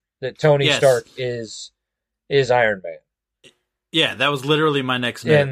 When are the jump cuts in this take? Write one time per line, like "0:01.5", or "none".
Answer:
none